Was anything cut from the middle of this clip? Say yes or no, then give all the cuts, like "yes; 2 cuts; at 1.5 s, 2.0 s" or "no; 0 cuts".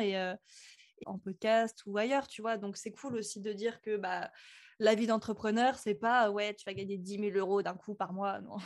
yes; 1 cut; at 1.0 s